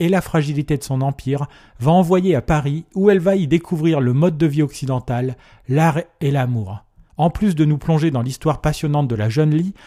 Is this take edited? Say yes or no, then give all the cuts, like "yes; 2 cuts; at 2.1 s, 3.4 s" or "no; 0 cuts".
yes; 1 cut; at 7.1 s